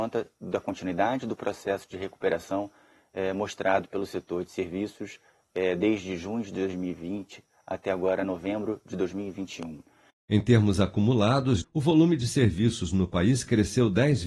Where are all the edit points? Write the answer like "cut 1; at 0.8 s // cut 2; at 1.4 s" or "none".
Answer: cut 1; at 10.1 s // cut 2; at 11.6 s